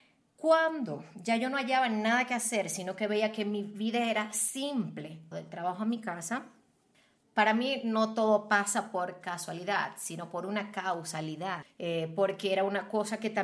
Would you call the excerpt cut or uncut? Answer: cut